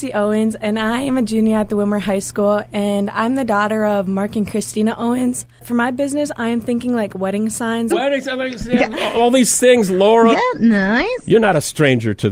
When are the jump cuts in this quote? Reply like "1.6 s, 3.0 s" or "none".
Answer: 7.9 s, 10.3 s